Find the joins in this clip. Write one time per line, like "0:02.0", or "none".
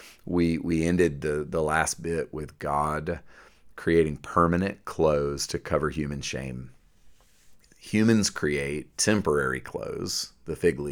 none